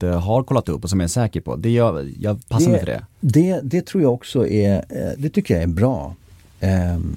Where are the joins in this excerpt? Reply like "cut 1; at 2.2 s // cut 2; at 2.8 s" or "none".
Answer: cut 1; at 5.1 s